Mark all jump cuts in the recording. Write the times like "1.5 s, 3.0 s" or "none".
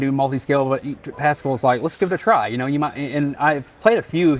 none